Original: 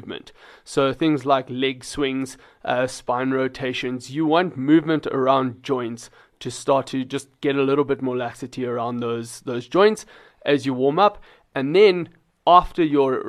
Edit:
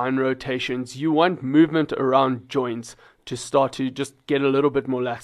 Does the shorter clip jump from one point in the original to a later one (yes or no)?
no